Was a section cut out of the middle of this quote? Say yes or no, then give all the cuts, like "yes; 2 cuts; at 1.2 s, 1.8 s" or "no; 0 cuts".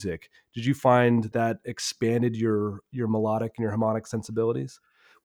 yes; 1 cut; at 1.3 s